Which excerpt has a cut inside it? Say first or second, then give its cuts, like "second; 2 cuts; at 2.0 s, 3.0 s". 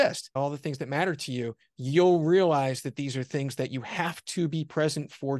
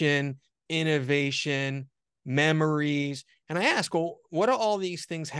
second; 1 cut; at 2.2 s